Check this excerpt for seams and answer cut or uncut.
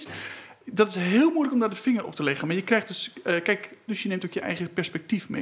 cut